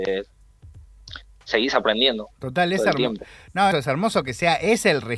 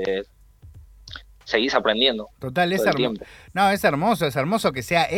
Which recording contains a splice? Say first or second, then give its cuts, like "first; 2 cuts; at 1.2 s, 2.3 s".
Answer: first; 1 cut; at 3.7 s